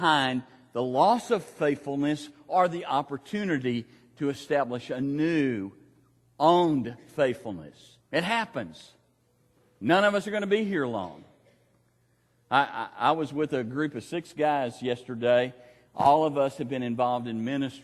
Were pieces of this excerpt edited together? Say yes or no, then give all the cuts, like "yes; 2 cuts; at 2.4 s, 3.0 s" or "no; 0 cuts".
yes; 1 cut; at 8.0 s